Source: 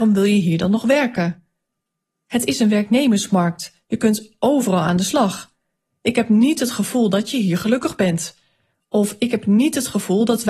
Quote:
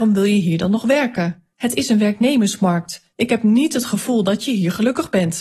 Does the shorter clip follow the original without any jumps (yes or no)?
no